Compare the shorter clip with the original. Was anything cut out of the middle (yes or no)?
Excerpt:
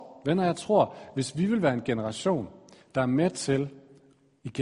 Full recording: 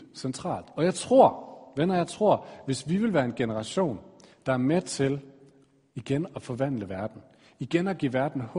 no